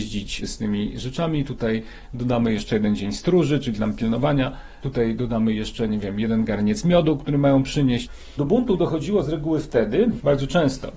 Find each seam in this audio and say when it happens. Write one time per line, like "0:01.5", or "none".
none